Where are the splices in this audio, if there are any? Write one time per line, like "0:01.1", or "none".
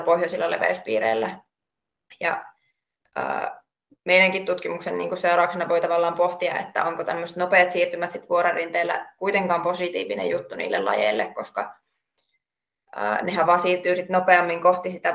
none